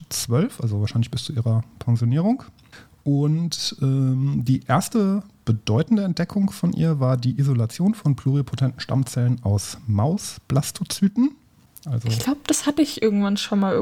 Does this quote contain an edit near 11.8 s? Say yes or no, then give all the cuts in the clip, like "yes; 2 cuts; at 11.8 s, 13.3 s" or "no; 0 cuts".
no; 0 cuts